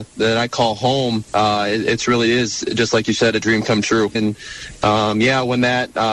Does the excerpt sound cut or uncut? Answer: cut